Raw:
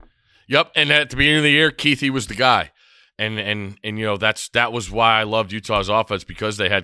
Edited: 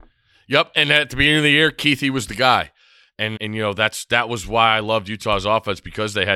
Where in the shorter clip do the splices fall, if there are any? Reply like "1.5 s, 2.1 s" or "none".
3.4 s

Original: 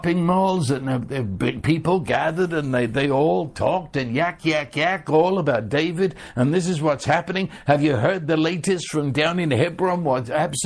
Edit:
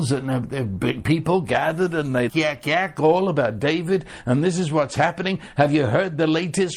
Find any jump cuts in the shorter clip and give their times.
2.3 s

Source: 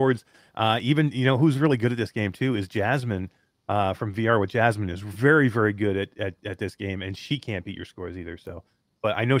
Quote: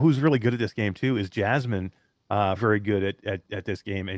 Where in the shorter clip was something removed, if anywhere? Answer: 2.6 s

